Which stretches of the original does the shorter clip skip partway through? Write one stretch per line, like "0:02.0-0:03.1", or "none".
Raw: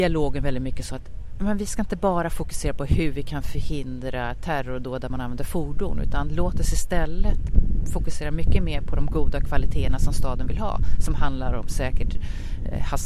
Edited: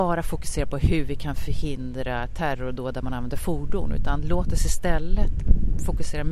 none